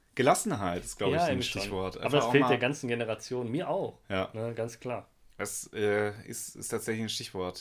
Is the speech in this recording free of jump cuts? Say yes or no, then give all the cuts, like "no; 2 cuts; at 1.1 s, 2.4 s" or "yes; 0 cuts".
yes; 0 cuts